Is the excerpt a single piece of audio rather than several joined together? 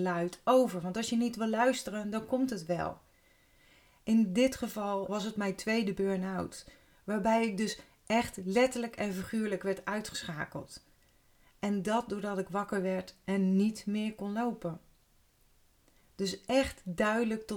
no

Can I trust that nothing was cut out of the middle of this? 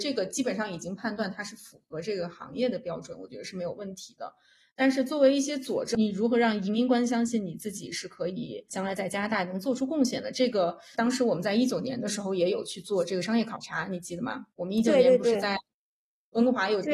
yes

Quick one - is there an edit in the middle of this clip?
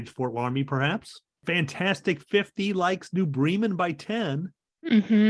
yes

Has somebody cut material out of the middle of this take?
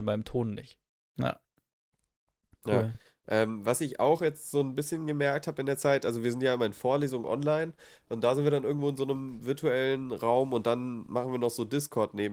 no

